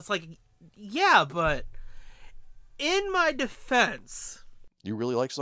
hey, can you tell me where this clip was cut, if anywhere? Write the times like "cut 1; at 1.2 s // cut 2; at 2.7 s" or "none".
none